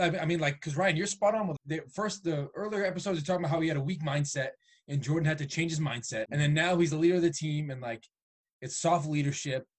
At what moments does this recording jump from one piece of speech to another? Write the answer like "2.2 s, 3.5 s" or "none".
1.6 s, 6.3 s